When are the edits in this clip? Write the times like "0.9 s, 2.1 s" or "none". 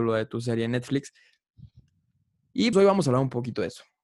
2.7 s